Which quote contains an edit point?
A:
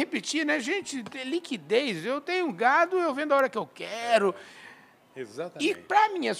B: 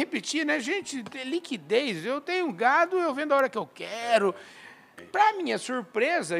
B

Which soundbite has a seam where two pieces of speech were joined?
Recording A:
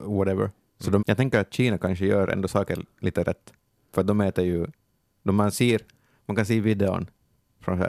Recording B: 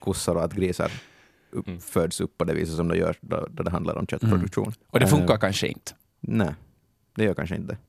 A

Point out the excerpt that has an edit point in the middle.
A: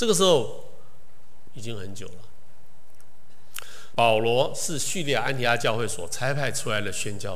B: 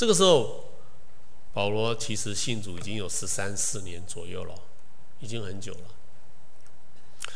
A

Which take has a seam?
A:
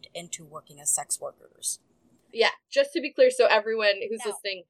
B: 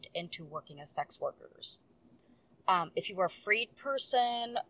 A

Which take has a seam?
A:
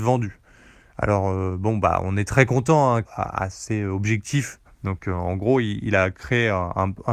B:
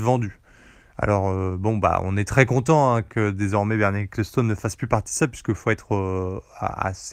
A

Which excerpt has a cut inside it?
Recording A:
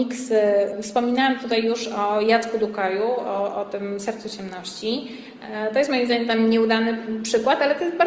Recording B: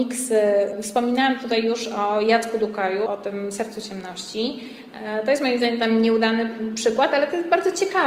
B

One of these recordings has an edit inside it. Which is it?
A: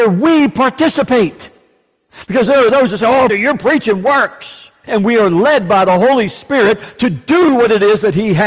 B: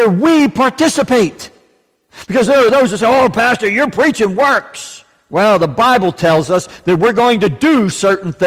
A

